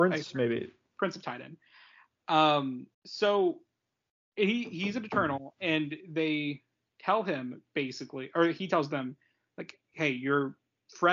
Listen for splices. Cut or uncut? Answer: cut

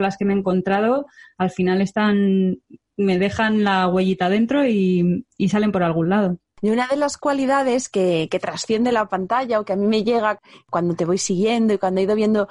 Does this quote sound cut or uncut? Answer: cut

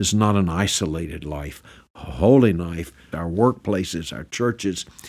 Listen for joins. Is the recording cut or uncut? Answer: cut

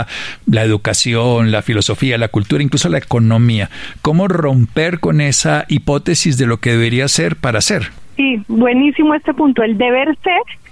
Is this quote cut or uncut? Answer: uncut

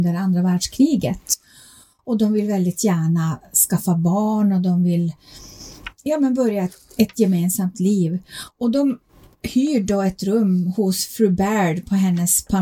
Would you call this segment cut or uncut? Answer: uncut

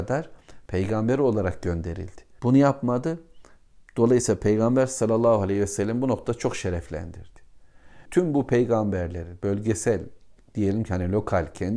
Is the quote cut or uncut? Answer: cut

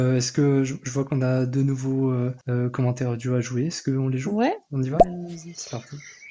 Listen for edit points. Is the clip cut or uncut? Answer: cut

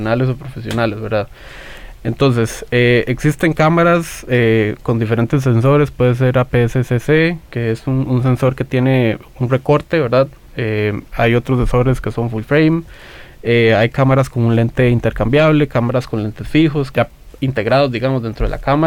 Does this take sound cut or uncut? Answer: cut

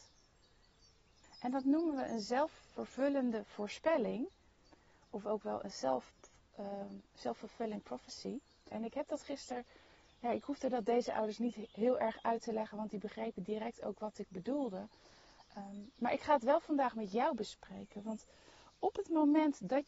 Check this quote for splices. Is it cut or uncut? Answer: cut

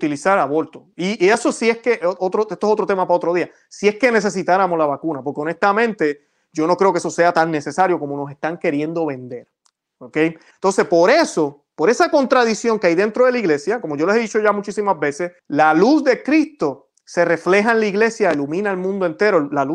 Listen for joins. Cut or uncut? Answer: cut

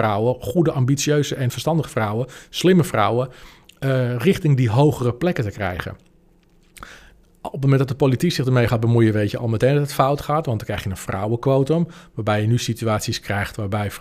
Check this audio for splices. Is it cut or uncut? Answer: uncut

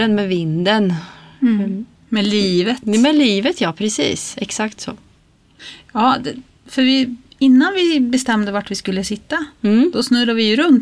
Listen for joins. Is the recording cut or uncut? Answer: uncut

